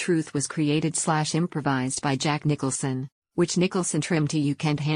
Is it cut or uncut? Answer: cut